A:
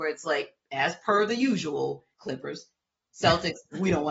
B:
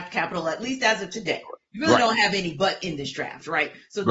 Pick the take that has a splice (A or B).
A